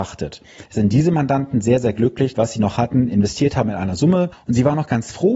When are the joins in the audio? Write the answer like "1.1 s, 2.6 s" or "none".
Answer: 2.3 s